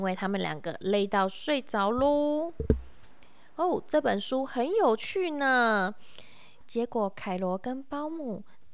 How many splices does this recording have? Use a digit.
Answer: 1